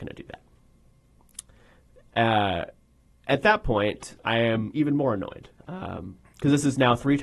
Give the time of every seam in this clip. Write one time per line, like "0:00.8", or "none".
0:04.2
0:05.6

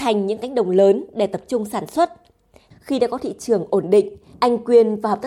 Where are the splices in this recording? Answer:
0:02.7

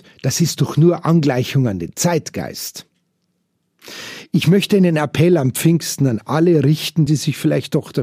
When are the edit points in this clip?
0:07.1

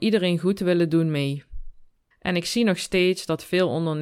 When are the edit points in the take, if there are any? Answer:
0:02.1

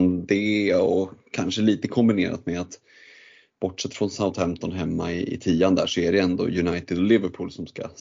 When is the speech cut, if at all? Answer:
none

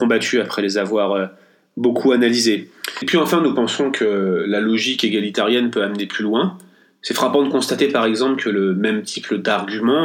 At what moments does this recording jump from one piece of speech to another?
none

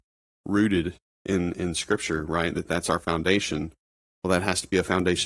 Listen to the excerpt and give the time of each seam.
none

